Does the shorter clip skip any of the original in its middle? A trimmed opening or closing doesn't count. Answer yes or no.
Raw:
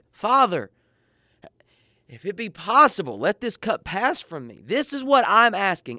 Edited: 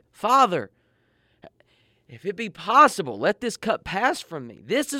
no